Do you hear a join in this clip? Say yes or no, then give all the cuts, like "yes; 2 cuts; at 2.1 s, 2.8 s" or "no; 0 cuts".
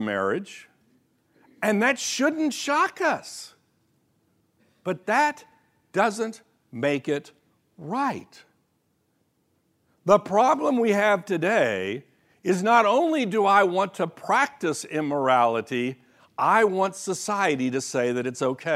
no; 0 cuts